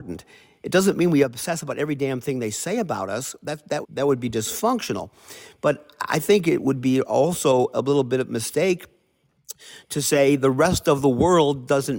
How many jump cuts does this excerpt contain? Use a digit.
1